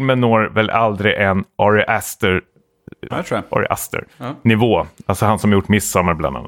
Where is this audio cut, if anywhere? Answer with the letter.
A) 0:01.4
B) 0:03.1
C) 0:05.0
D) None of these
B